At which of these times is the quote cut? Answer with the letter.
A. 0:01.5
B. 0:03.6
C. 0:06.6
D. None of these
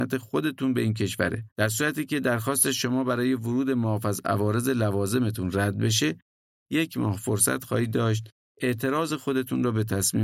A